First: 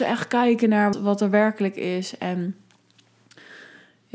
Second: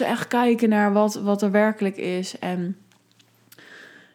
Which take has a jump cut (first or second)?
first